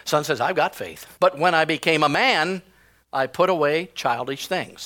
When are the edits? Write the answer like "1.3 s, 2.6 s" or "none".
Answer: 1.2 s